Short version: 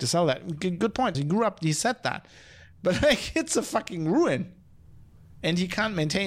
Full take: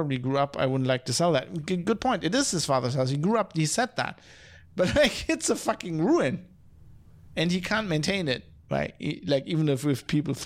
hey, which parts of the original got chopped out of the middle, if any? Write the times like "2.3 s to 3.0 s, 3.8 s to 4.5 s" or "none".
2.2 s to 3.1 s